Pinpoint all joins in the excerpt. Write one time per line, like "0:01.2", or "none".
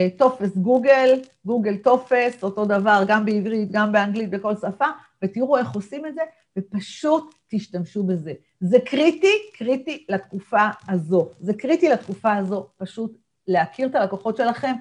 none